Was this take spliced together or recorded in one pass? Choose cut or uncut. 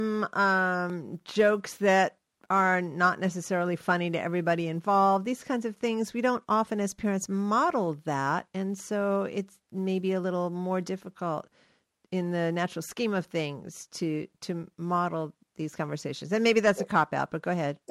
uncut